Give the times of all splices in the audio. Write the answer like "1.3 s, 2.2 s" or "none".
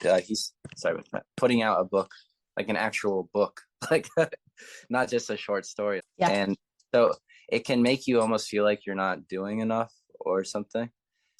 6.0 s